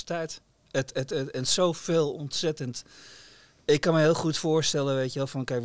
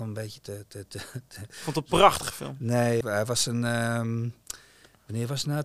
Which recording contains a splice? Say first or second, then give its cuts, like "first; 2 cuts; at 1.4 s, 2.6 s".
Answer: second; 1 cut; at 3.0 s